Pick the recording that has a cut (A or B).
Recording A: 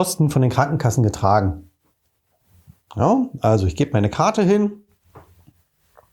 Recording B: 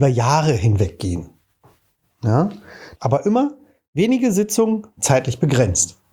B